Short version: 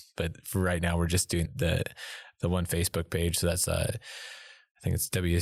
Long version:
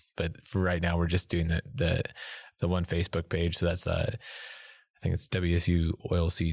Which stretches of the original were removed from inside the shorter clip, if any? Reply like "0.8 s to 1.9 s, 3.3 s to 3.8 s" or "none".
1.5 s to 1.6 s

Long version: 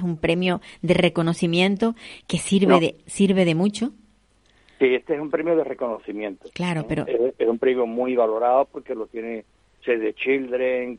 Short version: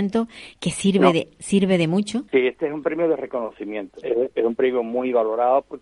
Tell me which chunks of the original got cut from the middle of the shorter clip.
4.0 s to 4.8 s, 6.5 s to 7.1 s

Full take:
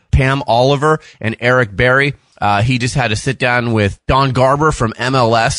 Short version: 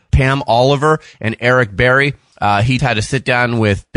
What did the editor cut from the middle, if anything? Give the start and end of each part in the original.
2.8 s to 2.9 s

